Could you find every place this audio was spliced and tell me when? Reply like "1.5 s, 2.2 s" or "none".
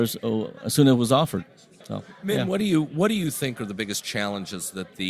1.8 s

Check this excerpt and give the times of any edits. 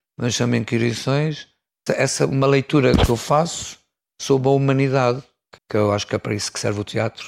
1.9 s, 5.6 s

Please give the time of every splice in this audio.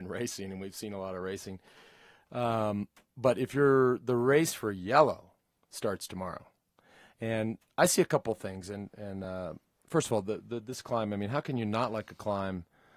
none

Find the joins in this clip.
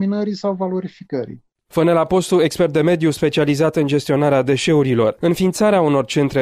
none

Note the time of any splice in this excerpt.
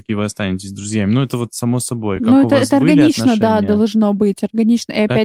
none

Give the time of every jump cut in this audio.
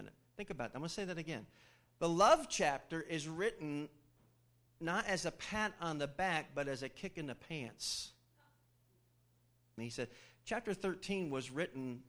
9.8 s

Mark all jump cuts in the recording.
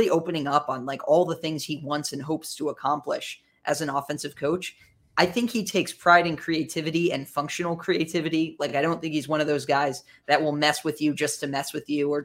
none

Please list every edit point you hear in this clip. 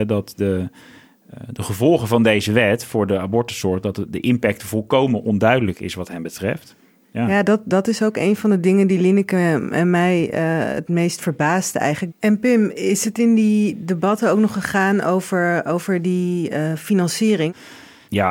7.0 s, 12.1 s

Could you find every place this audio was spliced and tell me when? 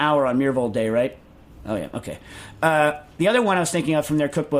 1.6 s

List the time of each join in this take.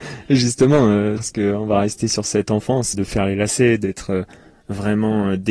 1.2 s, 2.9 s

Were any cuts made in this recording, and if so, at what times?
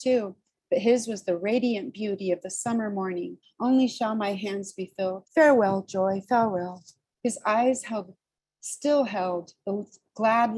3.4 s, 5.2 s, 7.1 s

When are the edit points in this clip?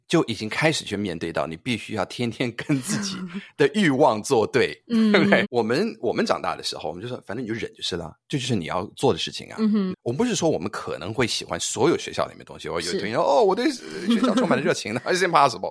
5.4 s, 9.9 s

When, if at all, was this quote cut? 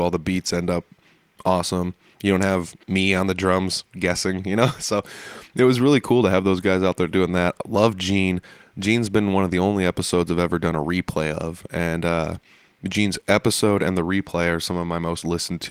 none

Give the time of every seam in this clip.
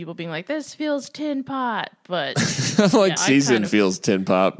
3.2 s

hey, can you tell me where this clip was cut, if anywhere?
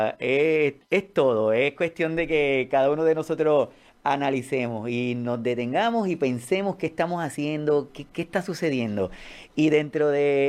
7.9 s

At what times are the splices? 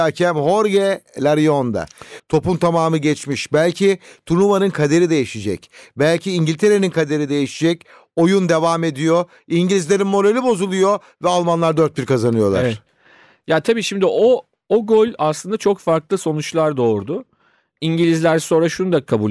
2.2 s

